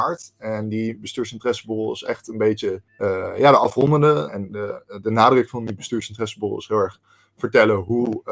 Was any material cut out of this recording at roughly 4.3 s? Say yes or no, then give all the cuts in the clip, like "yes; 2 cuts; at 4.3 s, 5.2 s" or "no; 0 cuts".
yes; 2 cuts; at 2.9 s, 4.3 s